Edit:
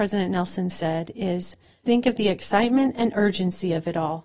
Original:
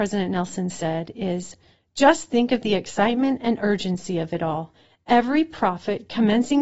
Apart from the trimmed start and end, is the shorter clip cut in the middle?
yes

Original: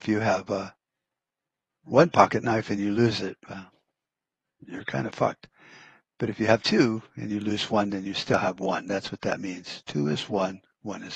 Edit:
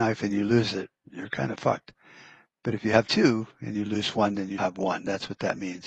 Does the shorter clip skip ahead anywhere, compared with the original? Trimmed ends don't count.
yes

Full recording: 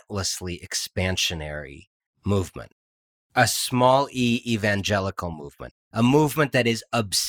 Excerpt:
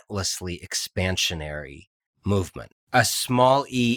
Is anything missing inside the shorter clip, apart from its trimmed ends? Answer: yes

